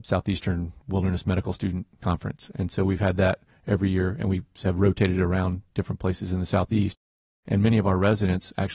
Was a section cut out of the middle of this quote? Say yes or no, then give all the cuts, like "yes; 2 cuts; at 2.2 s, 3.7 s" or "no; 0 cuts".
no; 0 cuts